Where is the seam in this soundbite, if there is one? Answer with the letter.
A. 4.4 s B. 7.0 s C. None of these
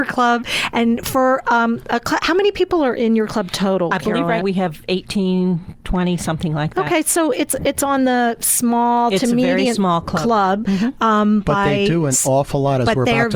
A